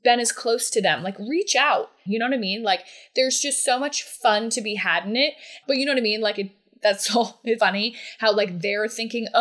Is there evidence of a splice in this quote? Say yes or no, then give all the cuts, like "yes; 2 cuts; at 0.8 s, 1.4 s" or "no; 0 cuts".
yes; 3 cuts; at 2.1 s, 5.6 s, 7.6 s